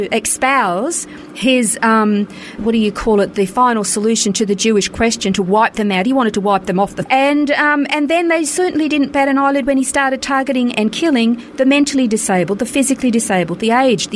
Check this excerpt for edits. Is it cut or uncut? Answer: cut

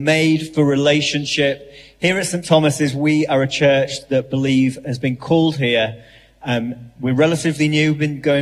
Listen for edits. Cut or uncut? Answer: uncut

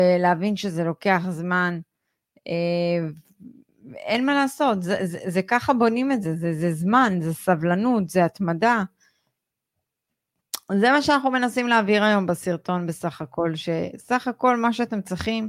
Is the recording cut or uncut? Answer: uncut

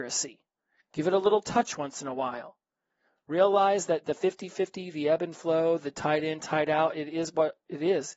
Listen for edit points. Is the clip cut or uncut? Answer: uncut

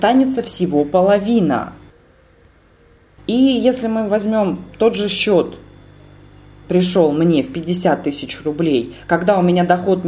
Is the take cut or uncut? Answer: uncut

